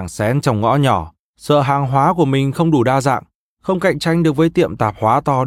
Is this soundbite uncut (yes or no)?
yes